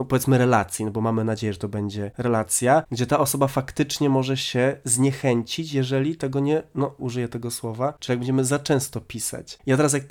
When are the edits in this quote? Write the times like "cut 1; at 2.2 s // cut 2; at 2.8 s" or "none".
cut 1; at 7.0 s // cut 2; at 8.0 s